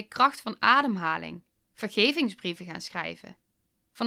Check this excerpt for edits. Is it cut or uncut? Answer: cut